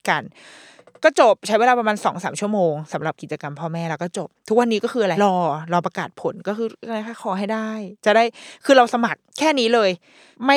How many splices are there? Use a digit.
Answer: 2